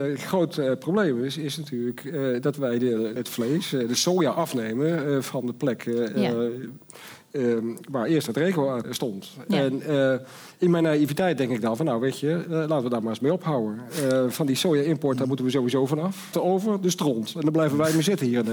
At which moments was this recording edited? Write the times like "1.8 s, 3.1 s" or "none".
3.2 s, 8.8 s, 16.3 s